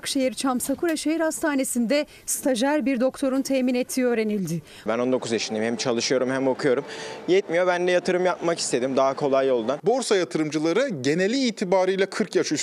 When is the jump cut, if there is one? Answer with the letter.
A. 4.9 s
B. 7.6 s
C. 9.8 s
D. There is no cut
A